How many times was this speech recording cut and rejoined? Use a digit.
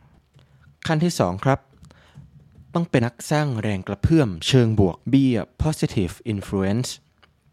2